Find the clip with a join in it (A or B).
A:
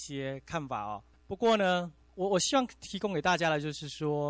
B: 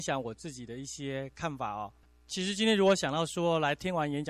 A